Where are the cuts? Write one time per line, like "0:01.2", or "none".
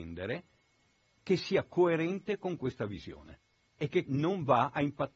0:04.1